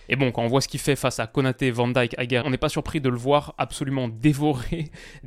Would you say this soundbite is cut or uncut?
cut